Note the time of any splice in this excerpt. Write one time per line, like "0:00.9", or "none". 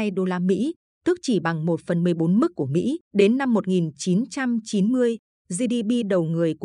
0:03.0